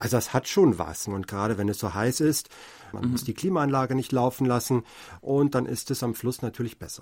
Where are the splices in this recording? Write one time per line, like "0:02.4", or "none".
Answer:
0:01.1
0:02.9